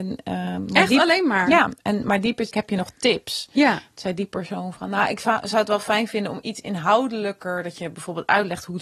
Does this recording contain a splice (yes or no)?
yes